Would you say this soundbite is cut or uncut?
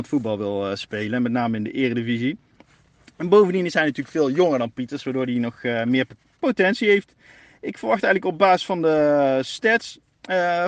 uncut